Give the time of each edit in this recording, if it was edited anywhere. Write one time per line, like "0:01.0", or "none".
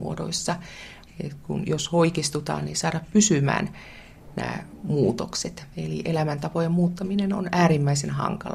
0:01.1